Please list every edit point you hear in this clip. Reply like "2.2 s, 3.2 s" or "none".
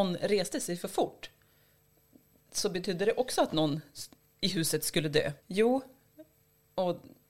5.4 s